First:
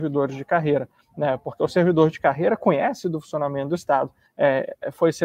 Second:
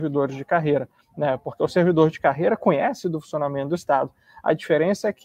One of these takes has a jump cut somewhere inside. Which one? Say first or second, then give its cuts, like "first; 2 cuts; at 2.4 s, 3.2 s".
first; 1 cut; at 4.2 s